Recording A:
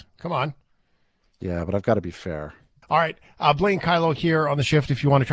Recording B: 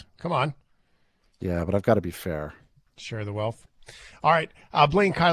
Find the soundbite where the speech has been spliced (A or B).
A